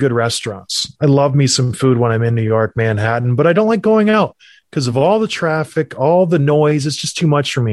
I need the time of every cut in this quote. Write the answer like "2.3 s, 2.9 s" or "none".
none